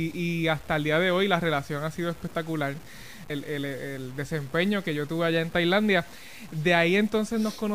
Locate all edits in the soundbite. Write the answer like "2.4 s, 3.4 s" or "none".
3.3 s